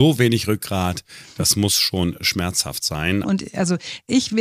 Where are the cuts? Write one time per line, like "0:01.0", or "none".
0:03.2